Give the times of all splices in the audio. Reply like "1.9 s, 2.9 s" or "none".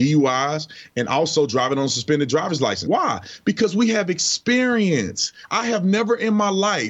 2.9 s